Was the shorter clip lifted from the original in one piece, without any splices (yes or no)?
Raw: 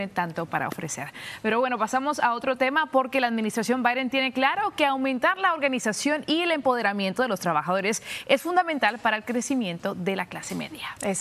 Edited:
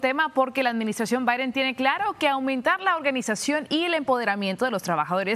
yes